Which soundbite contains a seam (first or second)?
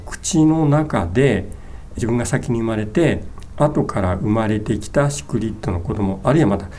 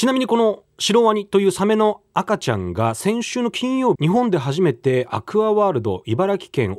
second